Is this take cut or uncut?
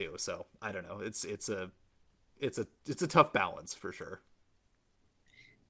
uncut